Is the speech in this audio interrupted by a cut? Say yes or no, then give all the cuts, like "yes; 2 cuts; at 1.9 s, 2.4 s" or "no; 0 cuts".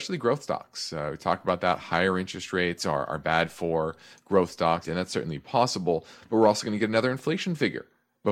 yes; 1 cut; at 4.8 s